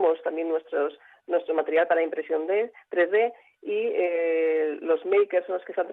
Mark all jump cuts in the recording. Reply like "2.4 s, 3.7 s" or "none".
none